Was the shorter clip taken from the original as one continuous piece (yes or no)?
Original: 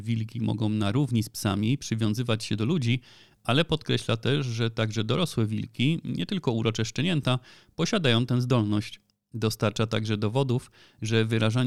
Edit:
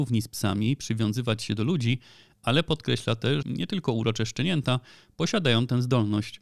no